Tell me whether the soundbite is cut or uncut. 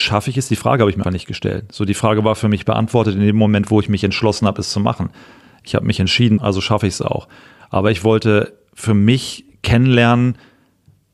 cut